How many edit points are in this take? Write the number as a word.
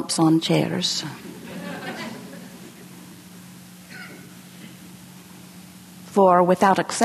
zero